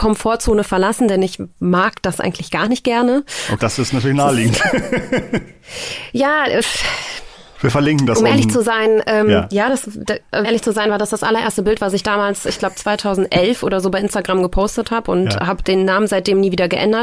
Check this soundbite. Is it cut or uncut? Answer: cut